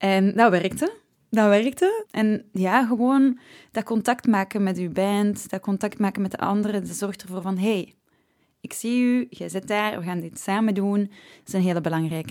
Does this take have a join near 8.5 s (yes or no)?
no